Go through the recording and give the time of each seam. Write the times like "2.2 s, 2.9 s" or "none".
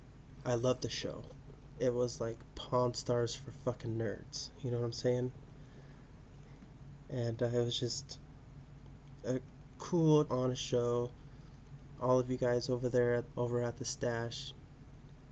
10.3 s, 12.0 s, 13.3 s